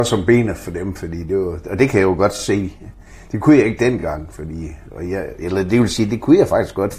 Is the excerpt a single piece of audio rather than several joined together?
yes; 0 cuts

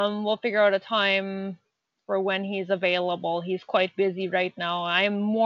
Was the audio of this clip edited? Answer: no; 0 cuts

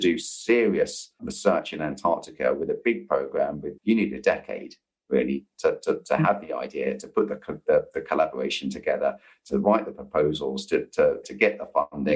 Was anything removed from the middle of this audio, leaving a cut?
yes; 2 cuts; at 3.8 s, 11.2 s

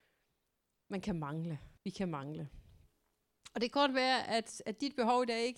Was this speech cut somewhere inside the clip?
yes; 1 cut; at 1.8 s

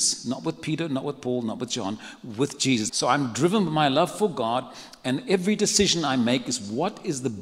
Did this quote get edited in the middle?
yes; 1 cut; at 2.9 s

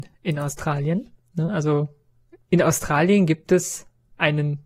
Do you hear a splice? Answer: no; 0 cuts

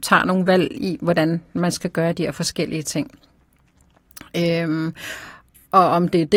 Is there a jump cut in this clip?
no; 0 cuts

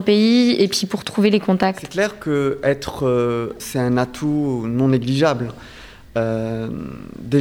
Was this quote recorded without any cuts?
no; 1 cut; at 3.6 s

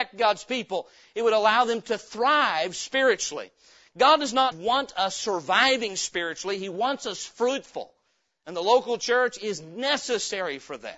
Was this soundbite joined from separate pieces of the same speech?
yes; 1 cut; at 4.5 s

